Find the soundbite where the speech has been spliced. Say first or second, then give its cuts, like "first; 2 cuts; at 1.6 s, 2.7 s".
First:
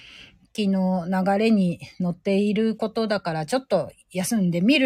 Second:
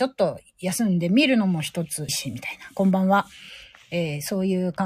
second; 1 cut; at 2.1 s